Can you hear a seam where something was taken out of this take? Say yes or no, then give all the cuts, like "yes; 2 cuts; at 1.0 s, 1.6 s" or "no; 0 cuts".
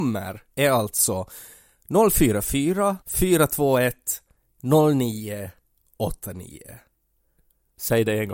yes; 1 cut; at 3.0 s